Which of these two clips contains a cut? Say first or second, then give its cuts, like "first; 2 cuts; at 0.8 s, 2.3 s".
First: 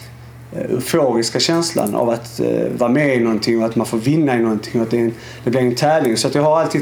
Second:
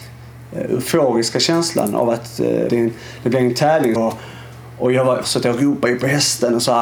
second; 3 cuts; at 2.7 s, 4.0 s, 5.2 s